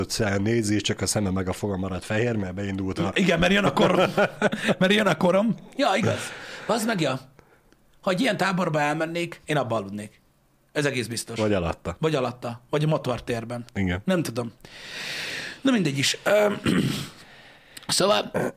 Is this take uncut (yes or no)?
no